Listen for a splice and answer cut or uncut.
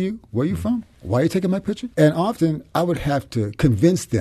cut